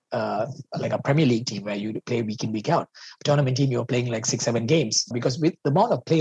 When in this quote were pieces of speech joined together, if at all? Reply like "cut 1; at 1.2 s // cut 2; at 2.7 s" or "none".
cut 1; at 5.1 s